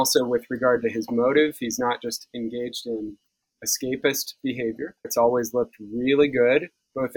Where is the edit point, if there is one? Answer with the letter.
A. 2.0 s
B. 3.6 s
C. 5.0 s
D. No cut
C